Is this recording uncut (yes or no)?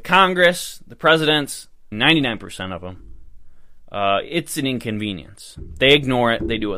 no